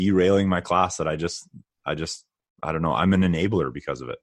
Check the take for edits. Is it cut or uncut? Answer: uncut